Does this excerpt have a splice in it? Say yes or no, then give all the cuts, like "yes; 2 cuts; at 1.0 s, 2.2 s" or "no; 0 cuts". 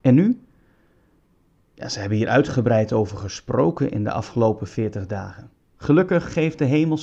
yes; 1 cut; at 5.7 s